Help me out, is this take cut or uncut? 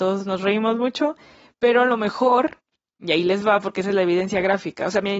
uncut